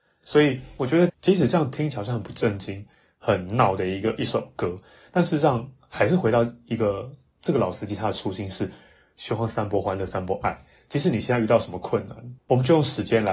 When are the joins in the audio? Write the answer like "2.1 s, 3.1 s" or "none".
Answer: 1.1 s